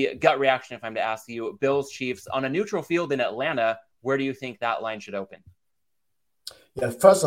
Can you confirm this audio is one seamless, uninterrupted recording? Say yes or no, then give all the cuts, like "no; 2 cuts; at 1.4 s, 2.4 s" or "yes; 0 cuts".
yes; 0 cuts